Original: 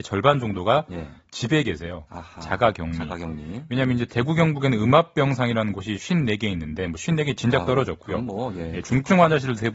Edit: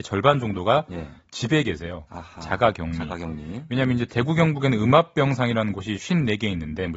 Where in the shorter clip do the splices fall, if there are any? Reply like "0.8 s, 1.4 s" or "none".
none